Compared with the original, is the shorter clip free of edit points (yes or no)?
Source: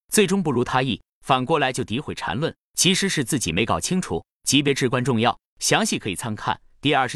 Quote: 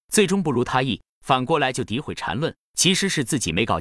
yes